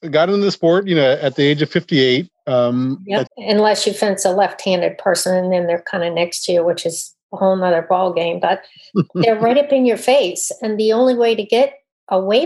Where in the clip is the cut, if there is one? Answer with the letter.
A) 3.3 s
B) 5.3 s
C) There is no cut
A